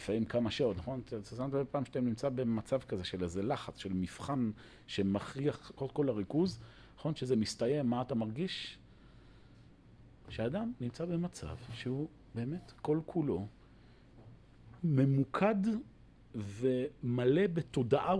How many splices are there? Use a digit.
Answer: 2